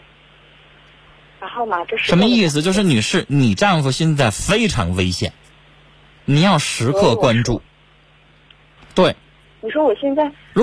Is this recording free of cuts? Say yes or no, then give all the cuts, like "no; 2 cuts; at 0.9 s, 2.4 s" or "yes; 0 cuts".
no; 1 cut; at 8.8 s